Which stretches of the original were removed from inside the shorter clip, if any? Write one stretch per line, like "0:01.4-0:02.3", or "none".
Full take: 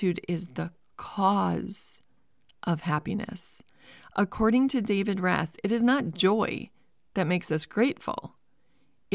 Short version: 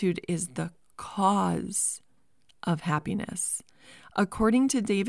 none